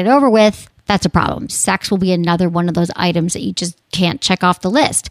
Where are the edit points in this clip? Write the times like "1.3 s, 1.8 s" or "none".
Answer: 1.5 s